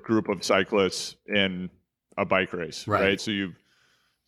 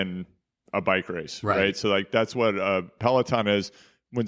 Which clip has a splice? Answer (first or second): first